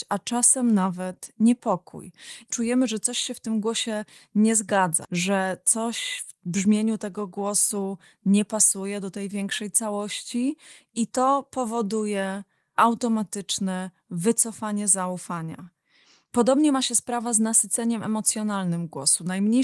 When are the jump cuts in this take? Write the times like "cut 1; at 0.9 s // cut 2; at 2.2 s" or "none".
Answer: cut 1; at 5.0 s